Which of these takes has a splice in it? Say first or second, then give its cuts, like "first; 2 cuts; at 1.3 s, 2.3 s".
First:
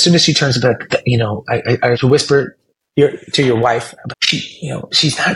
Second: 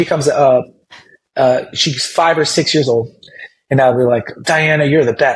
first; 2 cuts; at 1.9 s, 4.1 s